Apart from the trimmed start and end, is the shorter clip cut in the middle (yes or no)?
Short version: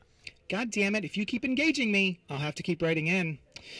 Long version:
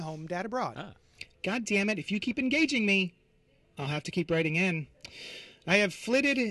yes